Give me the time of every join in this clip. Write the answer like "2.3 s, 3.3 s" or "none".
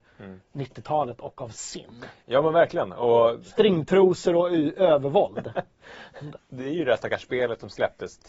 6.4 s